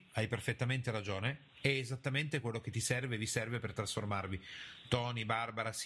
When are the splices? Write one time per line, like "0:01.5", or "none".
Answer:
none